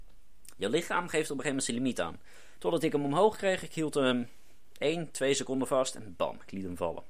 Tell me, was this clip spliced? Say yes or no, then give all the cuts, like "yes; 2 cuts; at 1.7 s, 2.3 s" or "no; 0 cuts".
yes; 1 cut; at 2.6 s